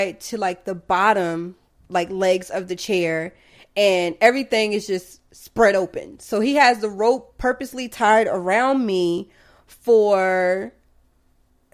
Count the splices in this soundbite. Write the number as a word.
zero